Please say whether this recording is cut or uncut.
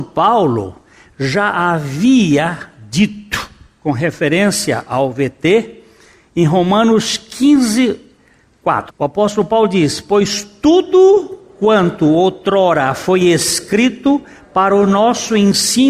cut